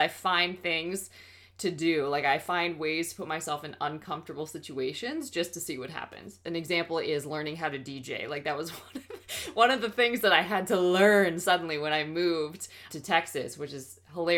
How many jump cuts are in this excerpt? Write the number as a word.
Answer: two